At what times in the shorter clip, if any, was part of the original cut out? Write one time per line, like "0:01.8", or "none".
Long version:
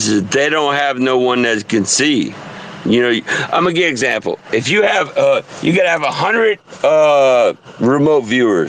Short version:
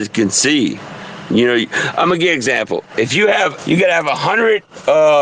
0:03.6